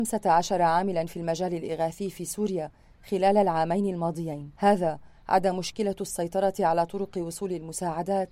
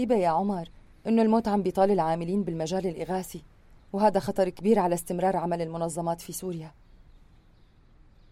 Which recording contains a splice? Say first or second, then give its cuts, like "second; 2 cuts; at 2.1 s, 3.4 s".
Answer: first; 1 cut; at 4.5 s